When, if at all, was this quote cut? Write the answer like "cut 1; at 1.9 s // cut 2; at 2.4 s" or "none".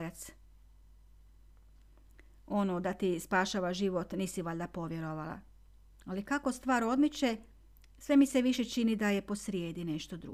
cut 1; at 5.9 s